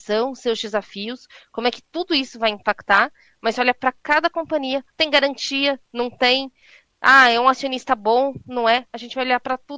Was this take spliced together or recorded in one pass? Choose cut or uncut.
cut